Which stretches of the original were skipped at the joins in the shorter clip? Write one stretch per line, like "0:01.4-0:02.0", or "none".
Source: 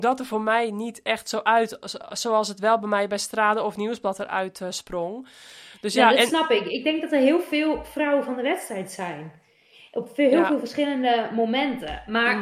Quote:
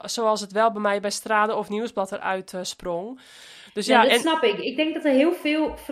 none